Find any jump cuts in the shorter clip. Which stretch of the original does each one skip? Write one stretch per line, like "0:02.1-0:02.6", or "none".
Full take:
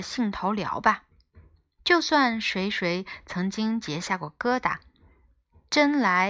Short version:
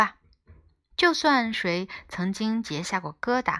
0:02.4-0:02.7

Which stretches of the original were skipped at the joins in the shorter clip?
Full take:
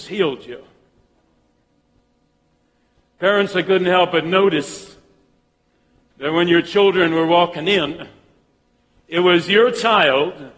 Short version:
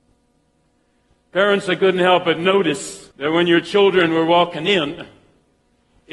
0:05.0-0:06.1

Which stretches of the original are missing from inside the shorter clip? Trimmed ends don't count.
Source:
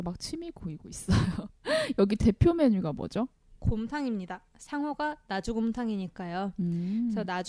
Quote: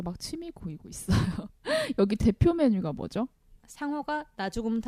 0:03.6-0:04.5

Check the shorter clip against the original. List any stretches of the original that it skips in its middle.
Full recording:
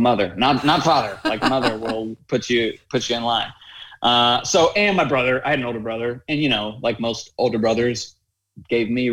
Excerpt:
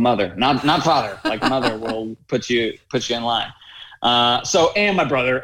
none

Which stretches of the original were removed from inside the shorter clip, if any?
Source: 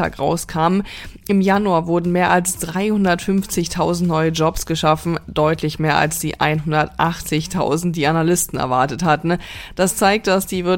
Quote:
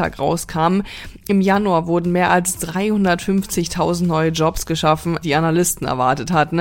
0:05.2-0:07.9

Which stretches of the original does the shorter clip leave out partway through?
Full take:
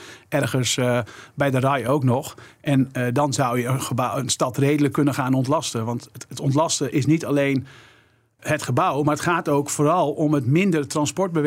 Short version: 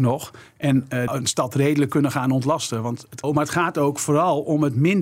0:03.1-0:04.1
0:06.3-0:08.9

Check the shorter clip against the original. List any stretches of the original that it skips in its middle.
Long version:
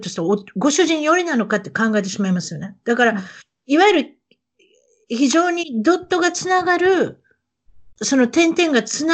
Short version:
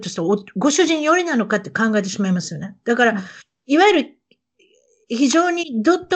none

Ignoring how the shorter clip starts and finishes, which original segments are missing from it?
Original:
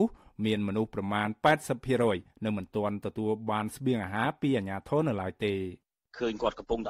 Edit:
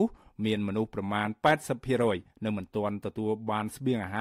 none

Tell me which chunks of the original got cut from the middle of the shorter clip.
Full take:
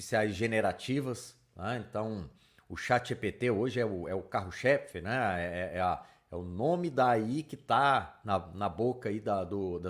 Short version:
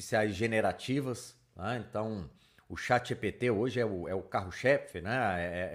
none

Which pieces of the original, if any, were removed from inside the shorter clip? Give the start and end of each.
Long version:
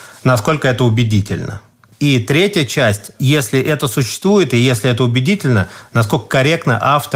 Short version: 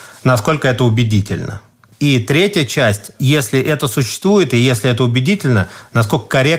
none

